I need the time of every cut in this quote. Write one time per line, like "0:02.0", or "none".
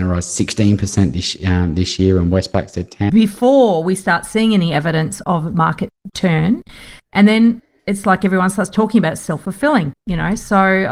0:03.1